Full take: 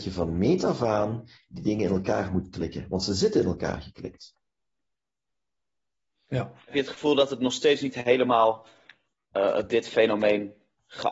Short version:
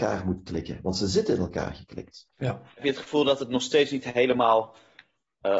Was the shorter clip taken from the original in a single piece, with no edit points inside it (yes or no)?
no